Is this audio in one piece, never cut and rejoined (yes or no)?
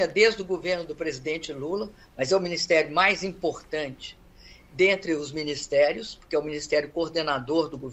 yes